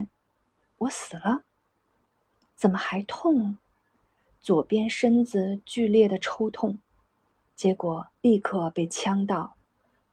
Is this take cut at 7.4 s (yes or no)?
yes